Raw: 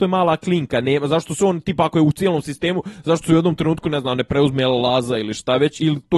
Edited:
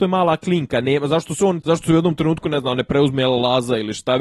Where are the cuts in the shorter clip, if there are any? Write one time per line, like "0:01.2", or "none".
0:01.6